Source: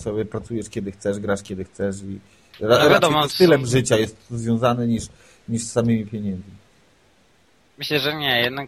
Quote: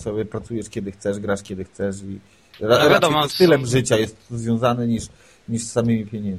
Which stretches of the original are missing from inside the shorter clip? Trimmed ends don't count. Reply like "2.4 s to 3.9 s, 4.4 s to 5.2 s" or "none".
none